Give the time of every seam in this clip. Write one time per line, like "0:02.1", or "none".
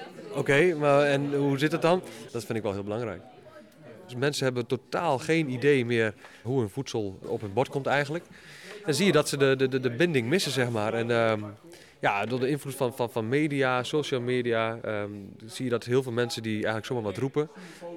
0:02.3